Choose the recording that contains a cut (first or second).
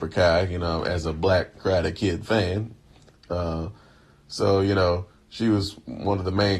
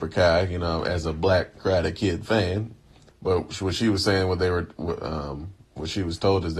second